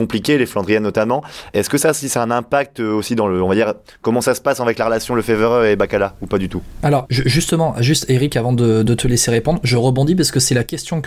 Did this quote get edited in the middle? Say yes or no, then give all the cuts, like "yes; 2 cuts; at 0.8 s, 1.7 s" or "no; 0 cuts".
no; 0 cuts